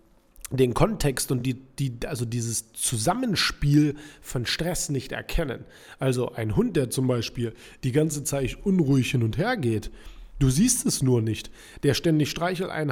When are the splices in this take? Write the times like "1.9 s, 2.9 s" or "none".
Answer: none